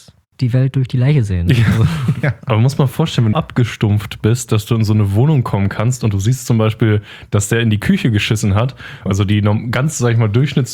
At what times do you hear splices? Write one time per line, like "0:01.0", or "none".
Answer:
0:03.3
0:09.1